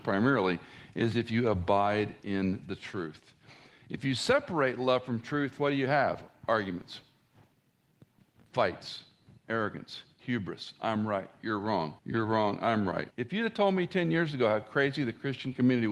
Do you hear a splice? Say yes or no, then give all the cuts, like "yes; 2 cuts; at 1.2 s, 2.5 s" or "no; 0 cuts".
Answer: yes; 2 cuts; at 12.0 s, 13.1 s